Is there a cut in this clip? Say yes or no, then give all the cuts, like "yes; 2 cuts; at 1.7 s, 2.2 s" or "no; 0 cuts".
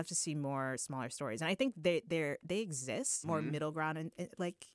yes; 1 cut; at 3.2 s